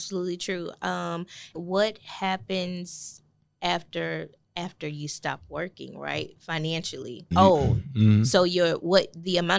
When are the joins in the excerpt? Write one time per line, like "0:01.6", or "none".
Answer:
0:01.5
0:07.3